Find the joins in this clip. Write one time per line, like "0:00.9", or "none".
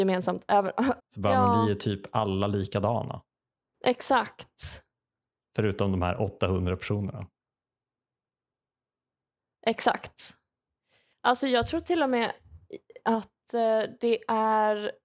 0:01.0